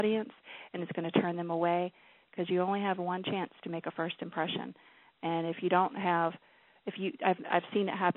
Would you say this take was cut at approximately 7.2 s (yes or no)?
no